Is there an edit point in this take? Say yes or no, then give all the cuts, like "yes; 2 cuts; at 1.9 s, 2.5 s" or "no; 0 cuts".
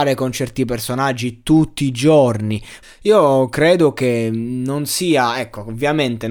yes; 1 cut; at 2.8 s